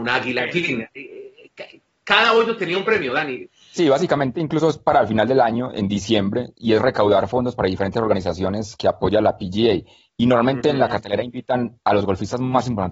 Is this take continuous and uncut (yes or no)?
no